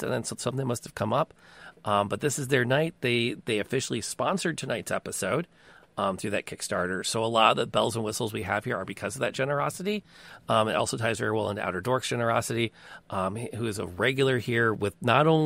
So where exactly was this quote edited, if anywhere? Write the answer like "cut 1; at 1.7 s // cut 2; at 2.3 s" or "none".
none

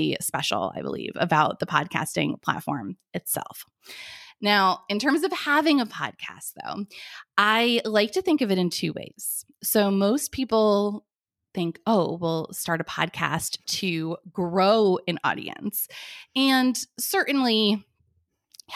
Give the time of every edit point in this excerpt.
none

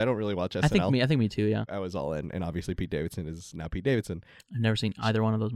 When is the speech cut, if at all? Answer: cut 1; at 1.7 s // cut 2; at 4.4 s

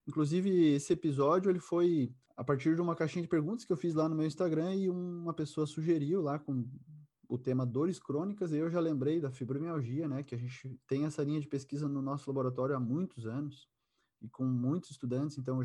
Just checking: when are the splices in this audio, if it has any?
none

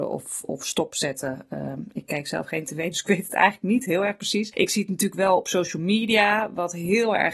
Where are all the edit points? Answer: none

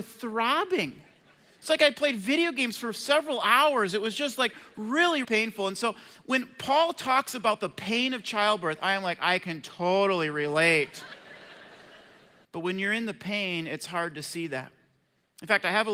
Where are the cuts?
cut 1; at 5.2 s // cut 2; at 12.4 s

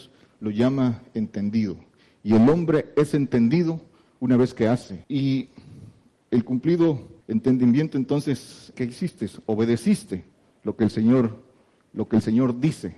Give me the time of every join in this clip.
cut 1; at 5.0 s // cut 2; at 7.2 s // cut 3; at 8.7 s

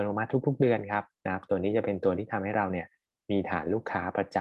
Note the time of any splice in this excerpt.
none

